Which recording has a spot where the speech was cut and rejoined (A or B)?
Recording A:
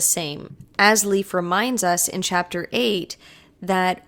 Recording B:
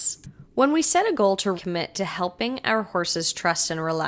B